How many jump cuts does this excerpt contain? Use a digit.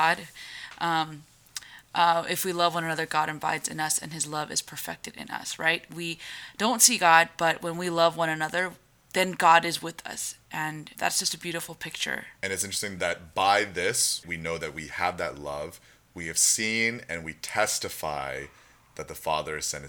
3